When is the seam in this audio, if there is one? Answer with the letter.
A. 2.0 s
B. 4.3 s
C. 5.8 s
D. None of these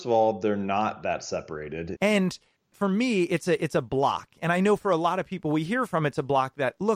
A